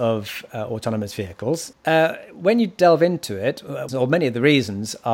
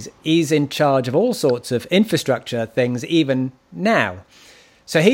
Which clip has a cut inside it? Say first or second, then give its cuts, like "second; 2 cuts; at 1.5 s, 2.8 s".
first; 2 cuts; at 1.7 s, 3.9 s